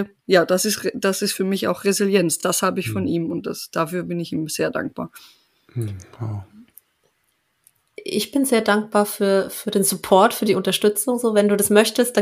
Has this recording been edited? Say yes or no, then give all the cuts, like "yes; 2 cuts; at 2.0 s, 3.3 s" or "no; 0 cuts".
no; 0 cuts